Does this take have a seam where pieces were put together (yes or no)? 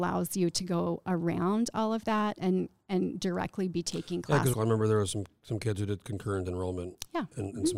yes